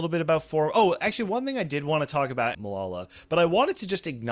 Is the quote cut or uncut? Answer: cut